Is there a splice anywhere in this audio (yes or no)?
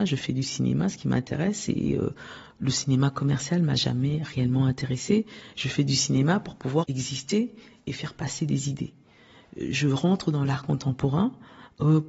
no